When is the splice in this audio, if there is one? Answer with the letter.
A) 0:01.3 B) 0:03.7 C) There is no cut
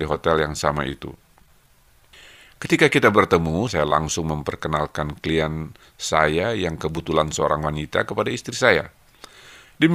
B